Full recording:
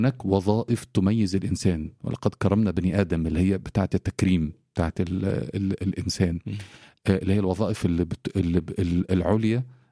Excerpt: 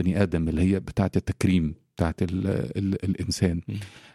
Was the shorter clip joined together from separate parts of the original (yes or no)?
no